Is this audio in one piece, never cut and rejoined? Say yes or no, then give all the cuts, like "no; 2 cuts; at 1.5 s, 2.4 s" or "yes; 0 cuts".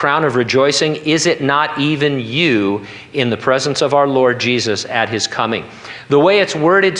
yes; 0 cuts